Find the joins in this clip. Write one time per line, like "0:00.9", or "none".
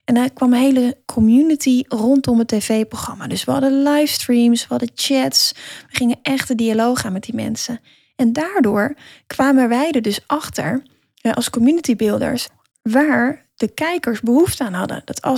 none